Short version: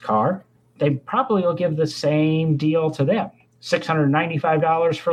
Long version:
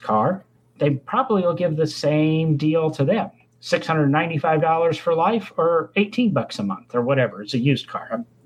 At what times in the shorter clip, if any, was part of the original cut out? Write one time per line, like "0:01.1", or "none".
none